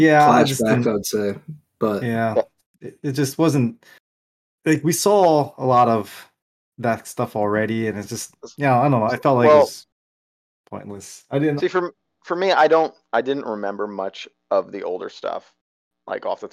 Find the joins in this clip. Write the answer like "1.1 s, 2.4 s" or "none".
11.6 s